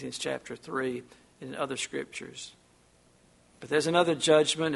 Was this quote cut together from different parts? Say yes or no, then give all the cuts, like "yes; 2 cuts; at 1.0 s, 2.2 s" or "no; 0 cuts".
no; 0 cuts